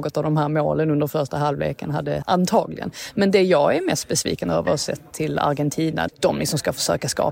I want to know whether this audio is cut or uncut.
cut